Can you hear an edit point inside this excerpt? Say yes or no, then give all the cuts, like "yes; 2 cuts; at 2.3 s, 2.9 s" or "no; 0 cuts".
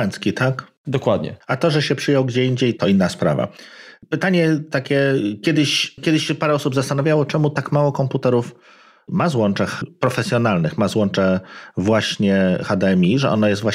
yes; 1 cut; at 2.8 s